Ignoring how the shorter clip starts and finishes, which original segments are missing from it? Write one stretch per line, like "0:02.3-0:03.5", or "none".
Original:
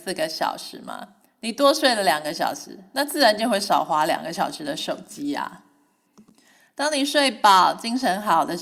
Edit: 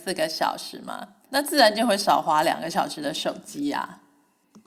0:01.3-0:02.9